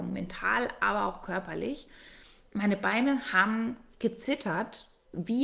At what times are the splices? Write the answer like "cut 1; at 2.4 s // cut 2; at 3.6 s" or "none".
none